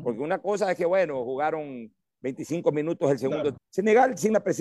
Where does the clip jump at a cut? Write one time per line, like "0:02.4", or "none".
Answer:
0:03.6

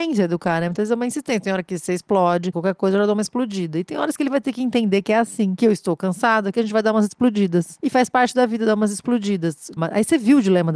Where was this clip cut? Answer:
0:02.5
0:06.5
0:09.8

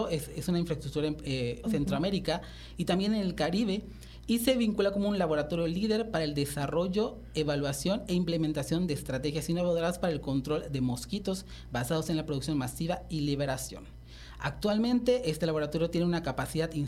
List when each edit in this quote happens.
0:01.6

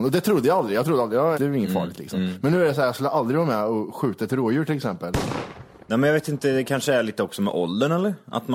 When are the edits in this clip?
0:01.3

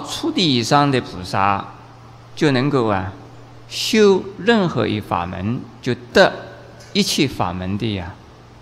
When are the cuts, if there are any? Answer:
none

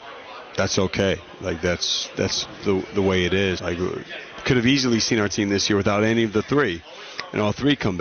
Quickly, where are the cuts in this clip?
0:03.6

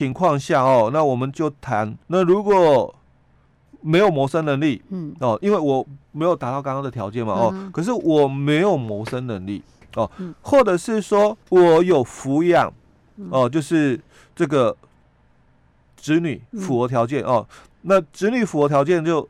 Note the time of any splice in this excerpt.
0:02.0
0:11.4

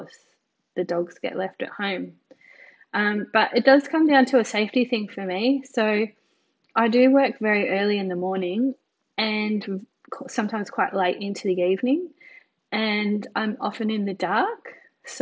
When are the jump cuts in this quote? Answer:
none

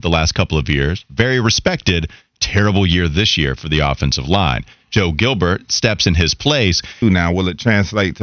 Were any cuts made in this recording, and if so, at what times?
0:07.0

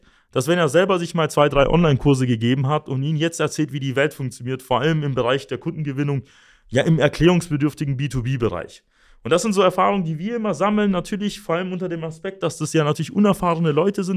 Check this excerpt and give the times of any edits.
none

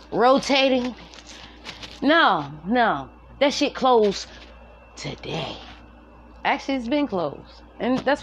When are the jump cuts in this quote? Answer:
0:02.6

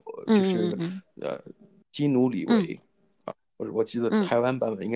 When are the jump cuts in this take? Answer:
0:01.8

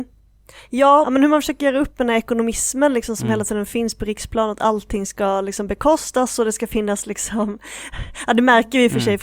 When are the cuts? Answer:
0:01.0

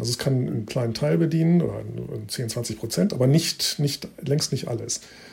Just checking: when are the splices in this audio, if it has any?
none

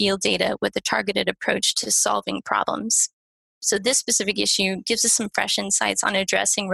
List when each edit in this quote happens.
none

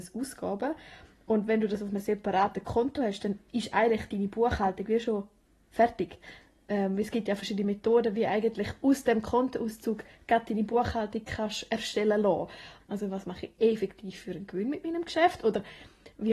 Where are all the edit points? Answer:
0:12.8

